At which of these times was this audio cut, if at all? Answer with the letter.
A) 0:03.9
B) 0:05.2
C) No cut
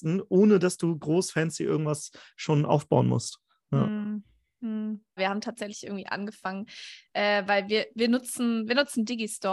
B